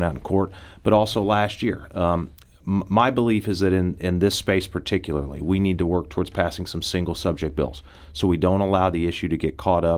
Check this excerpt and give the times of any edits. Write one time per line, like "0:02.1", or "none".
none